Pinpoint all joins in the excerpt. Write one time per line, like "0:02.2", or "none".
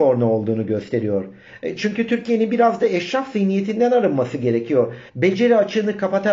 0:05.1